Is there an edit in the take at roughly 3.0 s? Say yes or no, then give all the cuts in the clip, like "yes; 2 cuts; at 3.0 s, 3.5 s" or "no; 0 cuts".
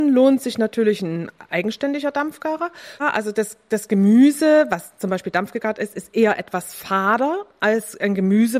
yes; 1 cut; at 3.0 s